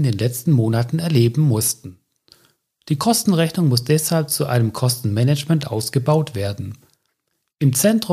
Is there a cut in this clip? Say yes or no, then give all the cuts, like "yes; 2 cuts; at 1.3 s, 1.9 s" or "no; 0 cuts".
no; 0 cuts